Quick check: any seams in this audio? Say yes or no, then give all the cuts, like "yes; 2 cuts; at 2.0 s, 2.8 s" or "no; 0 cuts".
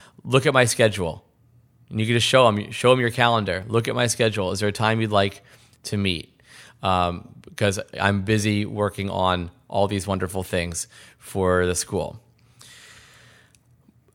no; 0 cuts